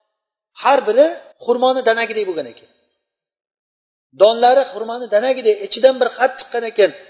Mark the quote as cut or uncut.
cut